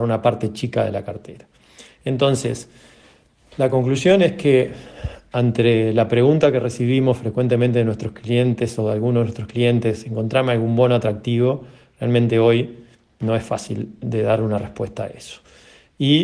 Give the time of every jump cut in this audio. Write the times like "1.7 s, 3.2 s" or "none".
none